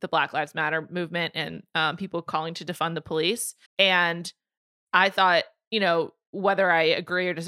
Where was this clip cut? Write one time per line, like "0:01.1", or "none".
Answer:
0:03.7